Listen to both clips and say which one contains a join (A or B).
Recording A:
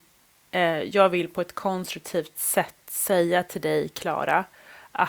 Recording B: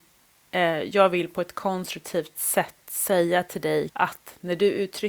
B